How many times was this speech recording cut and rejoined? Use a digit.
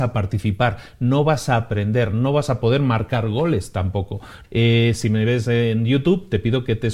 1